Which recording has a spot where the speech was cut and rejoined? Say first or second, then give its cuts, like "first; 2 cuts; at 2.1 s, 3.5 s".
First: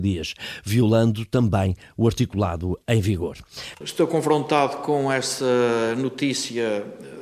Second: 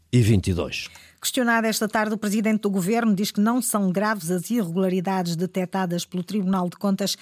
first; 1 cut; at 3.7 s